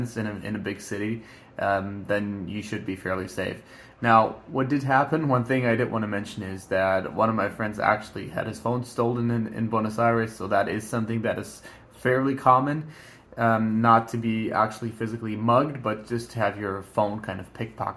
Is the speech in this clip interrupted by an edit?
no; 0 cuts

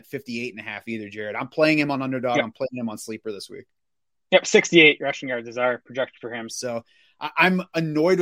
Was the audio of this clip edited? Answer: yes; 1 cut; at 6.5 s

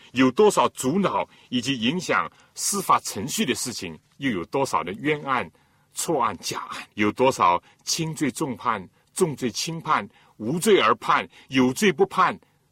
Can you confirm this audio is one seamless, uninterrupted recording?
no; 2 cuts; at 4.1 s, 6.9 s

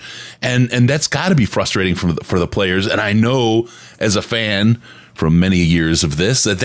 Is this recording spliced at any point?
no; 0 cuts

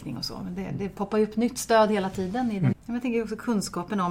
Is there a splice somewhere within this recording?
yes; 1 cut; at 2.7 s

